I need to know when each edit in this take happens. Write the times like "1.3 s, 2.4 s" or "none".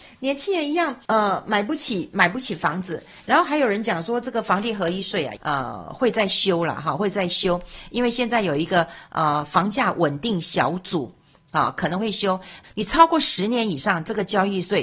1.0 s, 5.4 s, 12.6 s